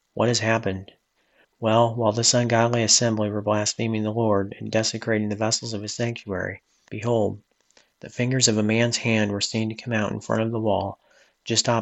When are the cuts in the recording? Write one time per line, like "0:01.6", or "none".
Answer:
0:01.4
0:06.9